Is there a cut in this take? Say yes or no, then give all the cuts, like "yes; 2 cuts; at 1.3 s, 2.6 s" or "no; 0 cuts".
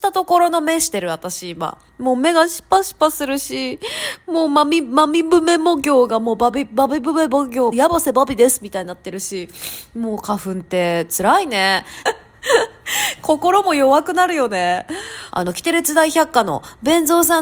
yes; 3 cuts; at 7.7 s, 12.1 s, 15.3 s